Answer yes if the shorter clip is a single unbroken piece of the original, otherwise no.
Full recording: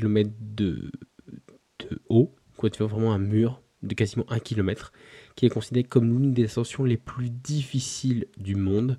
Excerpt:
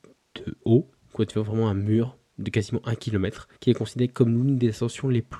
no